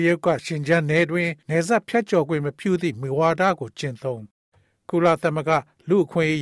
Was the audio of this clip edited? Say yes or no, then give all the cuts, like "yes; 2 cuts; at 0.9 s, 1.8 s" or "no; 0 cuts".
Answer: yes; 1 cut; at 1.4 s